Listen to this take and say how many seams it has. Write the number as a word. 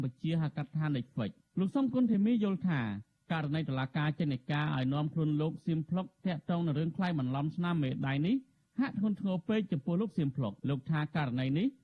one